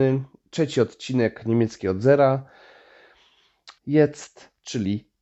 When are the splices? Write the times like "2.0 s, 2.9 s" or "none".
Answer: 3.8 s

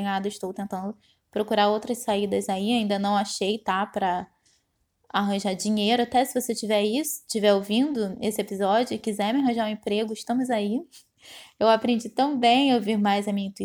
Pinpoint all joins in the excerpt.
none

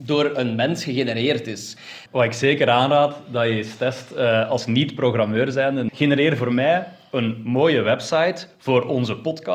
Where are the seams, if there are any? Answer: 2.1 s, 5.9 s

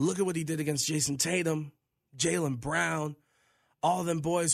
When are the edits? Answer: none

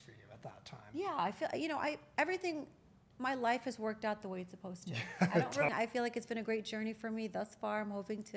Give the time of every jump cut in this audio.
5.7 s

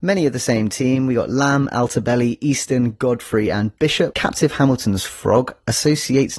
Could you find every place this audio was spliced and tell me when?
4.1 s

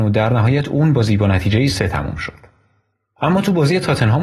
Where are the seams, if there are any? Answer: 1.7 s

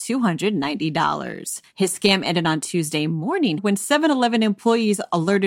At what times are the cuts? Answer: 3.6 s

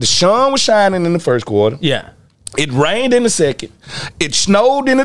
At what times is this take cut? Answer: none

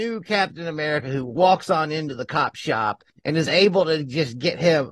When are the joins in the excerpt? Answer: 3.1 s

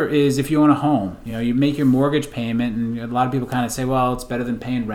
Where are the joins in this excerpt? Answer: none

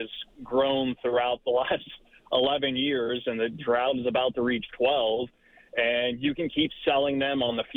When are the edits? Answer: none

